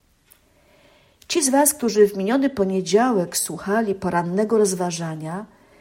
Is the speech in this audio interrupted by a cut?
no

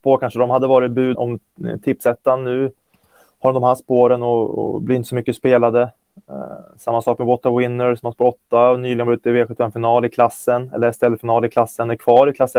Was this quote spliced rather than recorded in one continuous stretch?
yes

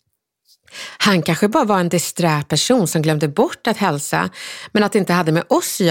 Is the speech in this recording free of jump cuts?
yes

